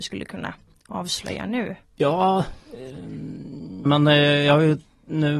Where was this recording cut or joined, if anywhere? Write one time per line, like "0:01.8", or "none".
0:03.8